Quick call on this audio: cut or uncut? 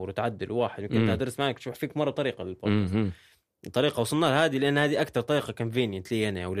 uncut